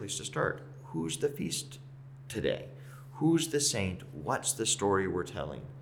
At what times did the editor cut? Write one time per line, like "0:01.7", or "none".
none